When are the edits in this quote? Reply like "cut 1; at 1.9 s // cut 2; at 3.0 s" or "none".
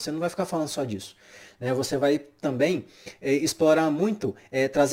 none